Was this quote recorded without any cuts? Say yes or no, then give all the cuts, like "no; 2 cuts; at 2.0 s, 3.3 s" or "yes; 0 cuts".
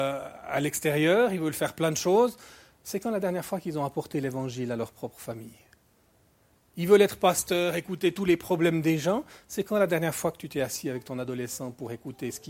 yes; 0 cuts